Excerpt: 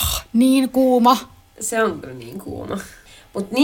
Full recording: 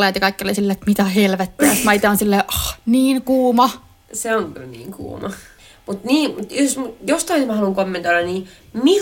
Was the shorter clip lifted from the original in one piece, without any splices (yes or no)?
yes